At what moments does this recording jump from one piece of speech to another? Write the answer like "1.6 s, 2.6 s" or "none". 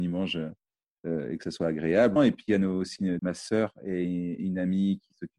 2.2 s, 3.2 s